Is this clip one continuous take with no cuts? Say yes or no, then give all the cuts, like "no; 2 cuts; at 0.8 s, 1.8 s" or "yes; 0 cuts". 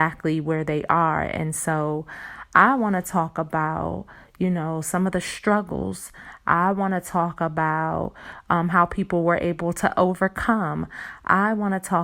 yes; 0 cuts